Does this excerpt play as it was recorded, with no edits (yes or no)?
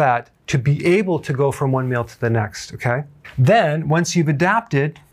yes